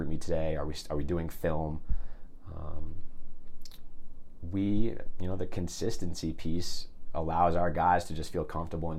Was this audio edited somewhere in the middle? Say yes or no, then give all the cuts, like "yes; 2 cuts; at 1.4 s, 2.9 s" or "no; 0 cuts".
no; 0 cuts